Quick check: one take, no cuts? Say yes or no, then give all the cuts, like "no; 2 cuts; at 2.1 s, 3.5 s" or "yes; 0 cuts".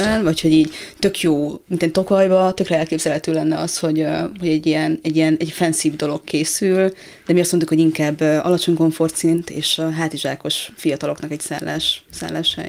yes; 0 cuts